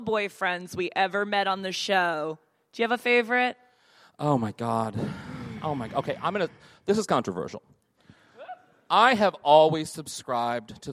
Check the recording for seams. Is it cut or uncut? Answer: uncut